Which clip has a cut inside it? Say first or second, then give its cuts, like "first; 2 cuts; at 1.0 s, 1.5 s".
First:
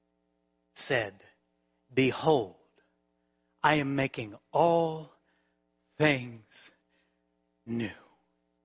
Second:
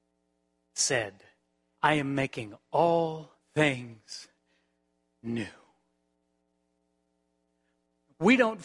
second; 2 cuts; at 1.8 s, 3.4 s